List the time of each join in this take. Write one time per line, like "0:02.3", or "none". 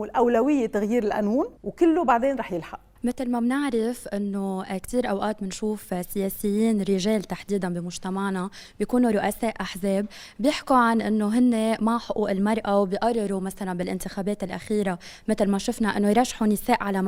0:01.6